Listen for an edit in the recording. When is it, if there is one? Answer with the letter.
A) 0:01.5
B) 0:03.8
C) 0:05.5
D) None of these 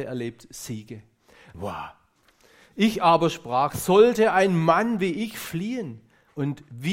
A